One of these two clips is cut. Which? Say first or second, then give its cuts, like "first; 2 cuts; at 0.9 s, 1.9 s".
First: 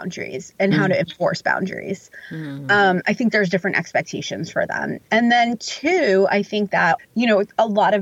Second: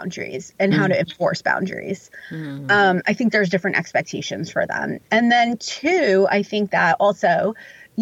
first; 1 cut; at 7.0 s